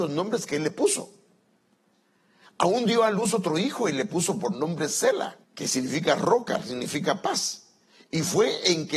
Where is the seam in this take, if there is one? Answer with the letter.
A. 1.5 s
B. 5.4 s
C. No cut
B